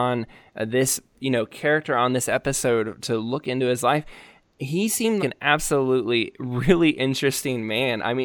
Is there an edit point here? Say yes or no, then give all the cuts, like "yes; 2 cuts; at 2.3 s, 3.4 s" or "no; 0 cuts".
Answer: yes; 1 cut; at 5.2 s